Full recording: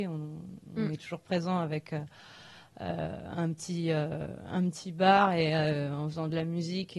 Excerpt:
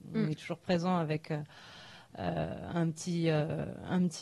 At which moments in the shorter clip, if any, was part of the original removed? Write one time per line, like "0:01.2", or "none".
none